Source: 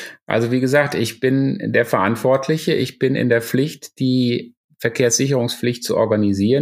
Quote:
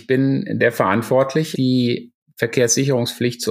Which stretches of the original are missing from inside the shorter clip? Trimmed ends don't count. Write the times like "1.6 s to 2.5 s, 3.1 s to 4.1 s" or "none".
2.7 s to 3.9 s

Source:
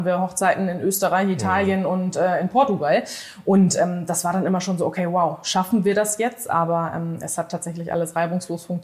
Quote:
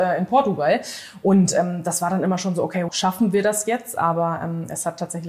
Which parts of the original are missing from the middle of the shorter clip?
5.1 s to 5.4 s

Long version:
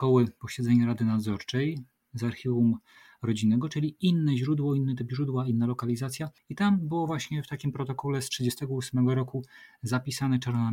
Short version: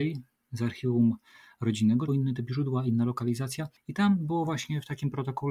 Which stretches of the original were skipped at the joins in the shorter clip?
3.7 s to 4.7 s

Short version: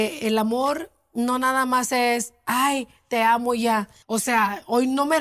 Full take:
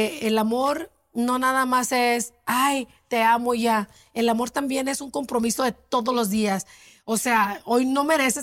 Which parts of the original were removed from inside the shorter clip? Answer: 4.0 s to 7.0 s

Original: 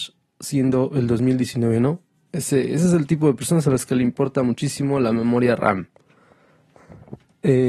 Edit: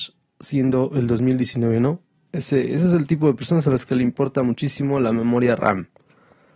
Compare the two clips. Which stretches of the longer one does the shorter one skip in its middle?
none

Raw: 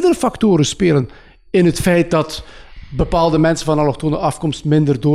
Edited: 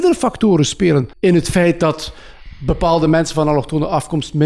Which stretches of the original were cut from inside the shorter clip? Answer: 1.1 s to 1.4 s

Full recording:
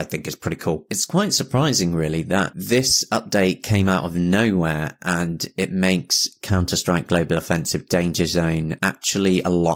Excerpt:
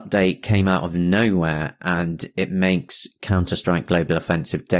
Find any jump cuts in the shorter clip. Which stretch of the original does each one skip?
none

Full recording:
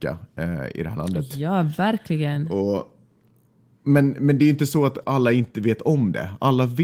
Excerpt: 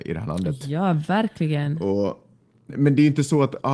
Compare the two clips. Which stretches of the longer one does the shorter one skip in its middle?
3.4 s to 4.1 s

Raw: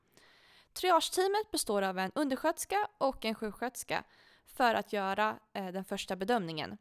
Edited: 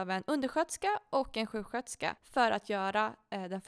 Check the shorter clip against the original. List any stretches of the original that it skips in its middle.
4.1 s to 4.4 s

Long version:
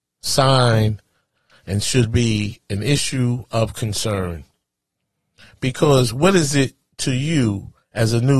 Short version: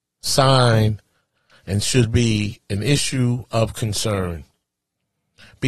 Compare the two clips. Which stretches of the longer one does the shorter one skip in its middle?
none

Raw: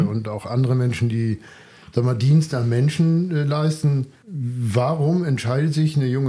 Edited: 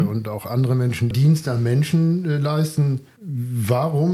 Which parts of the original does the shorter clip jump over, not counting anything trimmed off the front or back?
1.1 s to 2.2 s

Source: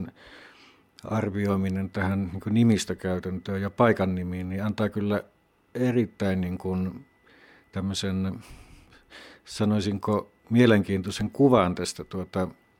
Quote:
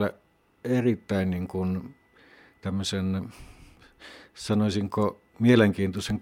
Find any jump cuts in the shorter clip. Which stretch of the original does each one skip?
none

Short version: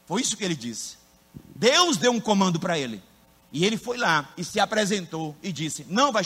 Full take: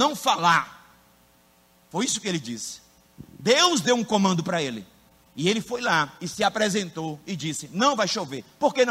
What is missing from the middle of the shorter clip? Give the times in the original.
none

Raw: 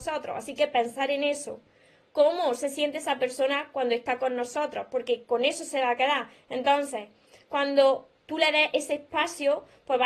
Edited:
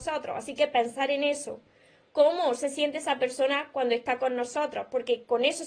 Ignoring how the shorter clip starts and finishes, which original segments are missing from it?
none

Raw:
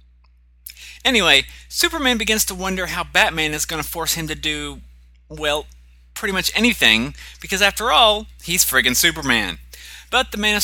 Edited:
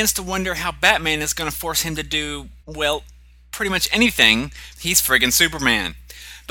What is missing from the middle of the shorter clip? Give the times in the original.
4.9 s to 5.2 s, 7.4 s to 8.4 s

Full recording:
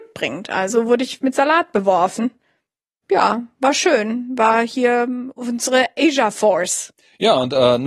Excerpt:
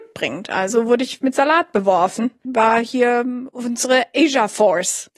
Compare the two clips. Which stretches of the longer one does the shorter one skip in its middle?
2.4 s to 4.3 s

